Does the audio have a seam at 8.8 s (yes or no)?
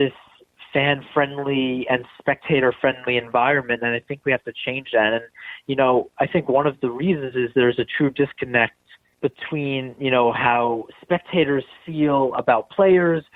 no